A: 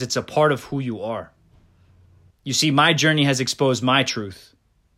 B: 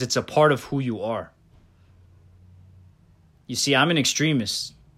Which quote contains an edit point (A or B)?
A